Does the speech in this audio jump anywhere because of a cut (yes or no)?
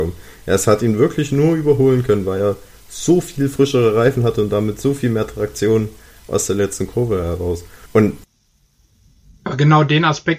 yes